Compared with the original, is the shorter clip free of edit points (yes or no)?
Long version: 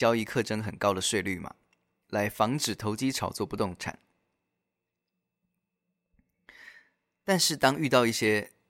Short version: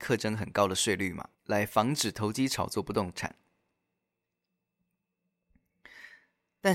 no